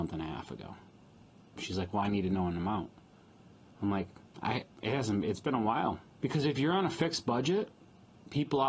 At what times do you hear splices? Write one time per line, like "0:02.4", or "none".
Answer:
0:01.5
0:06.1